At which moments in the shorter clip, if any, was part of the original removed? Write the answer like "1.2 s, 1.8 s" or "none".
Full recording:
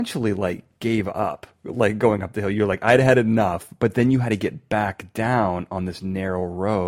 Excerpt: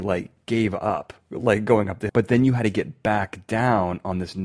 2.1 s